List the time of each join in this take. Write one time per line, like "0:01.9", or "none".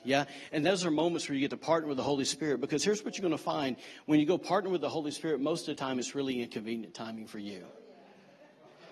none